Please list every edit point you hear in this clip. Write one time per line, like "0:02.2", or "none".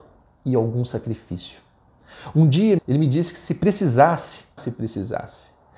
0:02.8
0:04.6